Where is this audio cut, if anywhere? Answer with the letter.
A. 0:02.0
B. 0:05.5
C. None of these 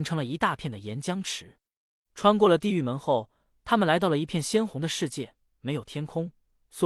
A